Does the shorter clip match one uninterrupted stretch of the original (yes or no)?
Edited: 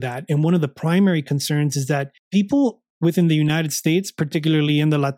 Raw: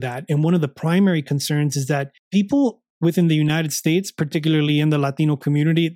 yes